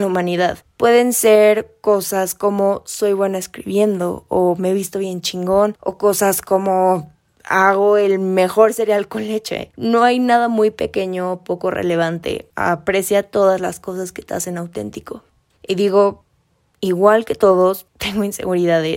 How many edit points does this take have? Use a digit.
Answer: 0